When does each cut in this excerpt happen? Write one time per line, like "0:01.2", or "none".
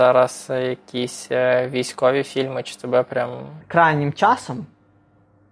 0:03.6